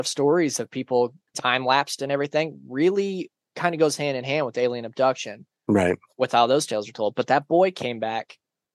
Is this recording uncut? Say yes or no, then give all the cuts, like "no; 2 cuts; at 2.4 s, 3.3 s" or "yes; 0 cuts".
no; 1 cut; at 1.3 s